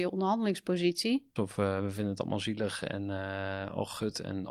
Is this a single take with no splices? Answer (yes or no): no